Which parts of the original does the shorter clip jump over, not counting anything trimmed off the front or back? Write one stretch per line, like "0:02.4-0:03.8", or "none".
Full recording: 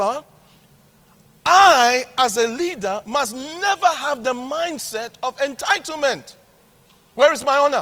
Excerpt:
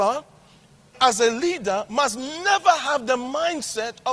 0:00.9-0:02.1